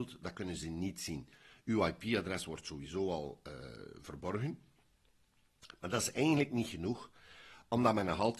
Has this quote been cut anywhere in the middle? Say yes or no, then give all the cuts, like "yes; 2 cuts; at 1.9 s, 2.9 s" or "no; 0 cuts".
no; 0 cuts